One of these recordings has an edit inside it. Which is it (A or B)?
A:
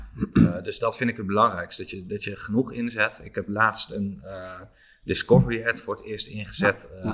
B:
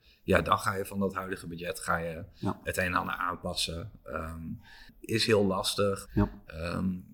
B